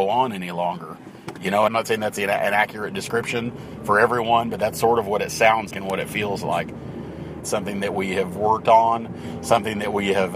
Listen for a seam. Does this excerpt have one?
yes; 3 cuts; at 1.7 s, 5.7 s, 7.4 s

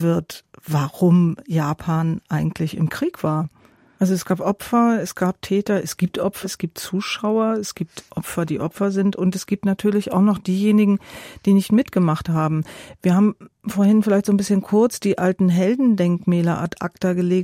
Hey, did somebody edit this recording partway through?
yes; 3 cuts; at 4.0 s, 6.4 s, 8.5 s

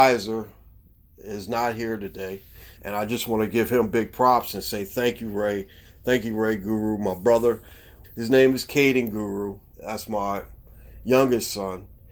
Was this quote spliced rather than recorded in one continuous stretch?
yes; 3 cuts; at 2.8 s, 8.0 s, 9.7 s

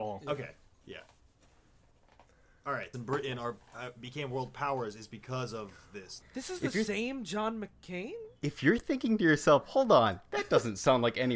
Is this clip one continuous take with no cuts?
no; 2 cuts; at 2.9 s, 6.2 s

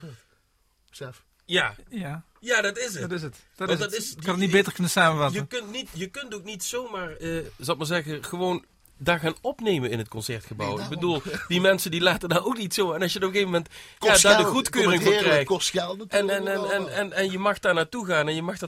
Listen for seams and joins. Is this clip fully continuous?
no; 1 cut; at 7.4 s

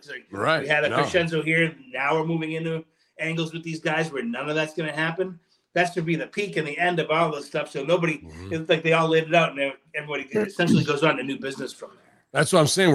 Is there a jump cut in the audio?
no; 0 cuts

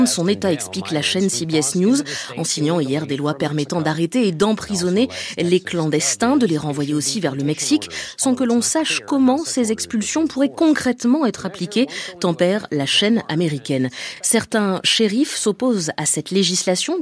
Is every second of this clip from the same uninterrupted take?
yes; 0 cuts

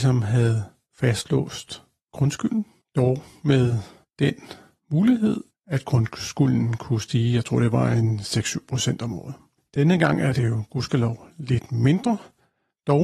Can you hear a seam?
no; 0 cuts

